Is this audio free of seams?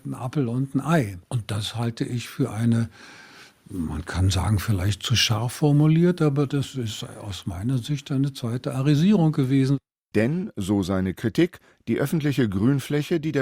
yes; 0 cuts

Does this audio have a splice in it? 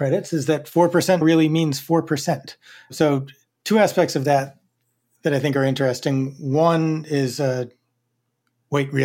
yes; 1 cut; at 1.2 s

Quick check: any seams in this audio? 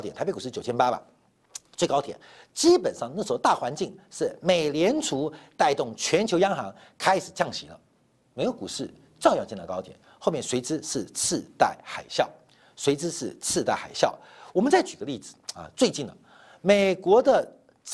no; 0 cuts

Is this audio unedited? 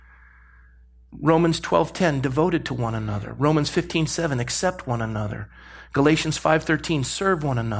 yes; 0 cuts

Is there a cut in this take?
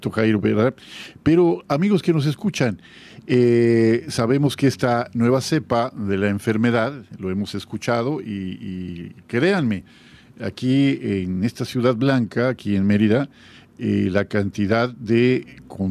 no; 0 cuts

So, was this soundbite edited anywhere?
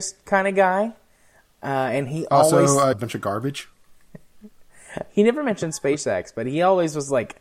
yes; 1 cut; at 2.9 s

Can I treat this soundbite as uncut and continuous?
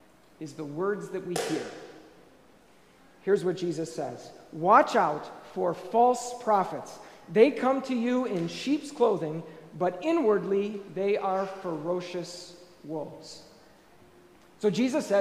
yes; 0 cuts

